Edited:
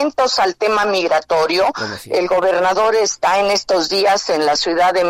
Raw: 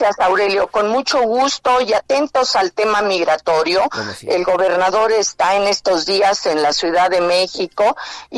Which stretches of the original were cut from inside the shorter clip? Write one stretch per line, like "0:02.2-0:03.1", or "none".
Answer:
none